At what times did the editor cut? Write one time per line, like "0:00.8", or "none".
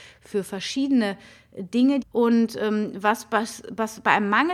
0:02.0